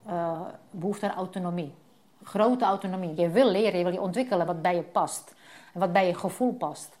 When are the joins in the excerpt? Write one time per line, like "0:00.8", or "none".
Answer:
0:03.2
0:04.5